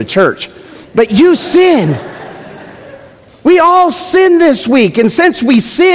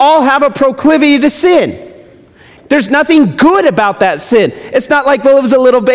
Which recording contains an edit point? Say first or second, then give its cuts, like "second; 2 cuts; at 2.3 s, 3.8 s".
second; 1 cut; at 2.6 s